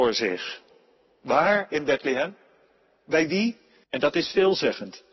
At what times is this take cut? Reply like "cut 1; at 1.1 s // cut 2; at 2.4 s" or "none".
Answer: cut 1; at 3.8 s